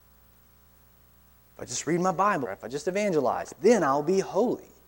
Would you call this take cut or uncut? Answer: cut